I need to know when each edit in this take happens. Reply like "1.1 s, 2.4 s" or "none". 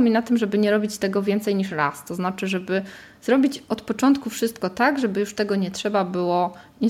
none